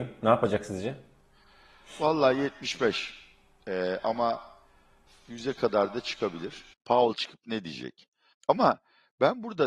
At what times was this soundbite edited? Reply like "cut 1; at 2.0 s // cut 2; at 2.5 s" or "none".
cut 1; at 6.7 s // cut 2; at 8.3 s